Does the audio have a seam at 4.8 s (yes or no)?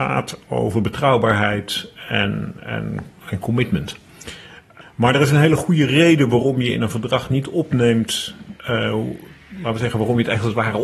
yes